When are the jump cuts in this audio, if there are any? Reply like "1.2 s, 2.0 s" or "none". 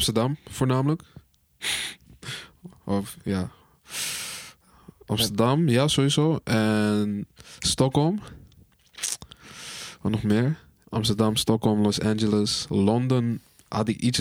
10.8 s

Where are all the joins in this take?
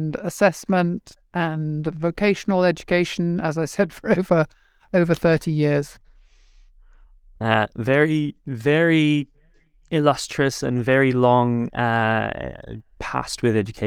none

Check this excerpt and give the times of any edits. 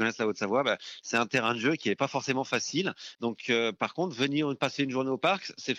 3.1 s

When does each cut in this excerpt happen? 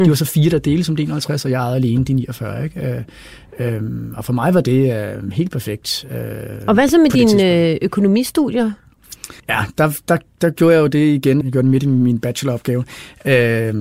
9.4 s, 11.4 s

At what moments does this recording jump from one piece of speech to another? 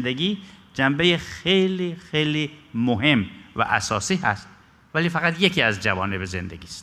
none

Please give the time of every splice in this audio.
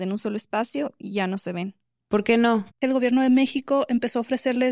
2.7 s

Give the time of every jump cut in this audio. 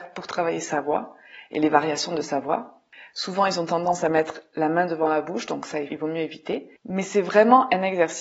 5.9 s

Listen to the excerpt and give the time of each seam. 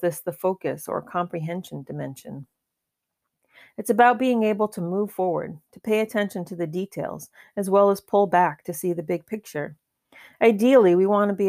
none

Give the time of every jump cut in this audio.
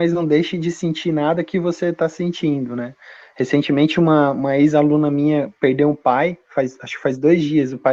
none

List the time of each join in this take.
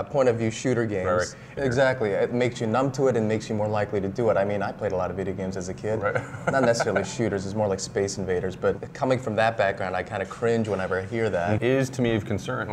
1.6 s, 11.6 s

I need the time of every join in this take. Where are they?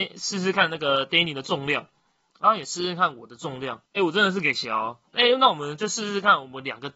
3.9 s, 5.1 s

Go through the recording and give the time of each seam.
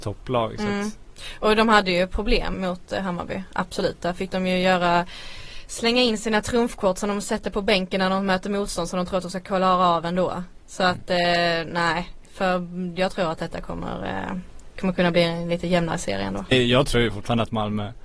2.5 s, 16.5 s

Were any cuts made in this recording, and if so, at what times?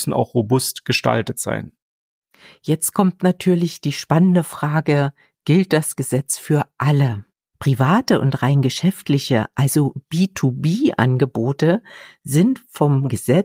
7.5 s

